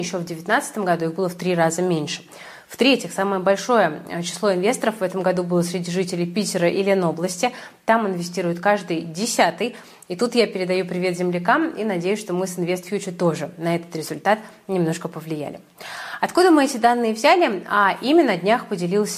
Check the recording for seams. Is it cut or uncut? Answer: uncut